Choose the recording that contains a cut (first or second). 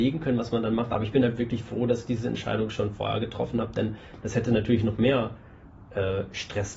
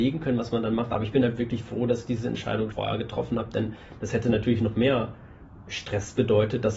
second